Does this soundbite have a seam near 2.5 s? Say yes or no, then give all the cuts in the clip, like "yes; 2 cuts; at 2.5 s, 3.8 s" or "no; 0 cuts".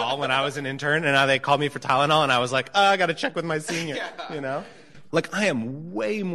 no; 2 cuts; at 3.9 s, 5.1 s